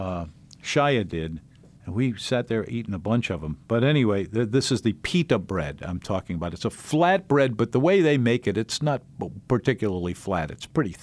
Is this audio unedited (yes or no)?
yes